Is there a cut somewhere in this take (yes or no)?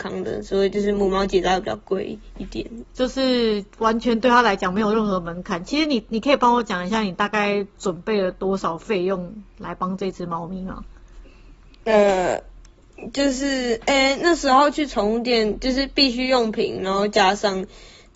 yes